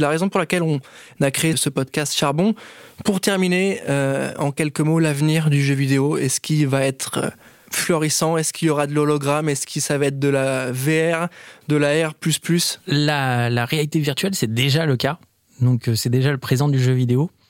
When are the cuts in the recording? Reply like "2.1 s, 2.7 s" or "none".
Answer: 1.5 s